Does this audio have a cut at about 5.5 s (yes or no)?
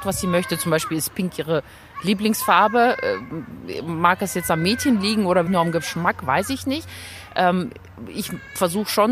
yes